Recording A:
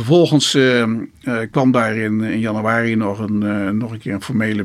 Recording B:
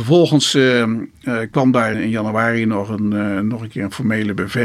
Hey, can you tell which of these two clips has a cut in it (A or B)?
B